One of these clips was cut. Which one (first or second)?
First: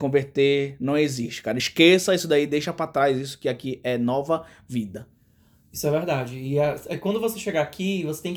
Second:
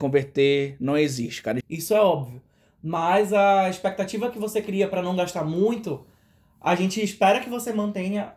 second